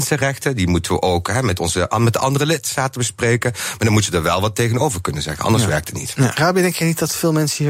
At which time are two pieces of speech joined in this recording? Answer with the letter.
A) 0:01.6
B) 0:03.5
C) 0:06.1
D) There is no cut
D